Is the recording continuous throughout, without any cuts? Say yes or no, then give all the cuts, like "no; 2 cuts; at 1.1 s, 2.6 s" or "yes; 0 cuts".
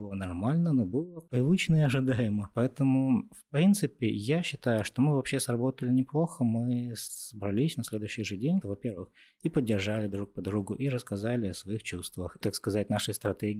no; 2 cuts; at 8.6 s, 12.4 s